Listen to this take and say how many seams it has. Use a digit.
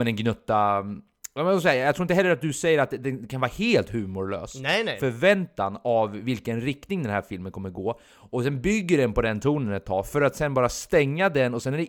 1